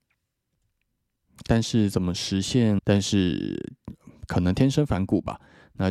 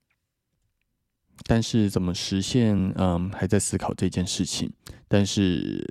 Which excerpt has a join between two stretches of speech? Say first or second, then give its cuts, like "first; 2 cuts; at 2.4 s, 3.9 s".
first; 1 cut; at 2.8 s